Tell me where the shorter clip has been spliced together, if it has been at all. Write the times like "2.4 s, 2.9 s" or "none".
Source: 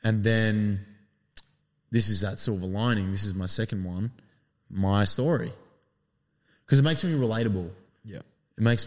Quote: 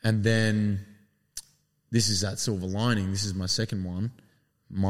none

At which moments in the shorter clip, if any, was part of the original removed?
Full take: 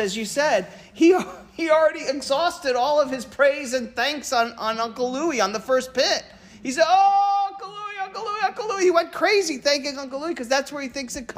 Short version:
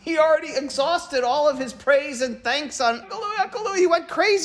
3.0 s

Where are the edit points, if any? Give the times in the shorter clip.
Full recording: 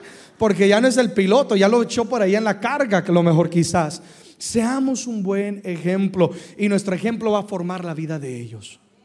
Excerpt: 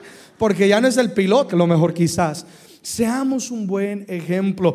1.5 s

